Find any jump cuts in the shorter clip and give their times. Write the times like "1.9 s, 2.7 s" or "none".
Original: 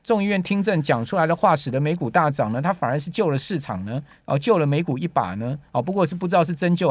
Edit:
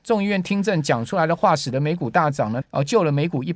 2.6 s